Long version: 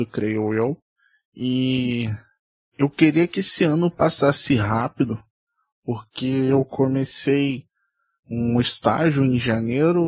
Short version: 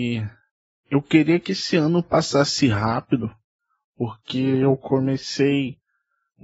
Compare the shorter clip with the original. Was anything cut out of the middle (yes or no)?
no